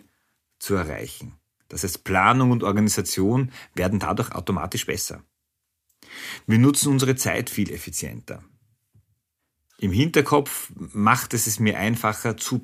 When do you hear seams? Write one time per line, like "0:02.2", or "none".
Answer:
none